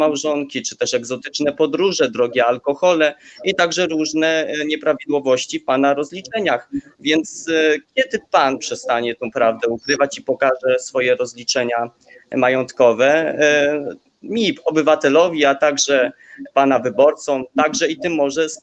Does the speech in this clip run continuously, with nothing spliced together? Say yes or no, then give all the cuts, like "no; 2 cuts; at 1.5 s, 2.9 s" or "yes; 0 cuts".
yes; 0 cuts